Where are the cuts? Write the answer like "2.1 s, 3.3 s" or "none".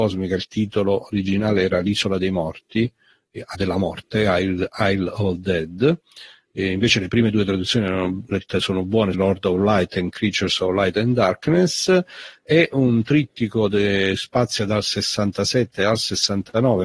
3.5 s, 9.1 s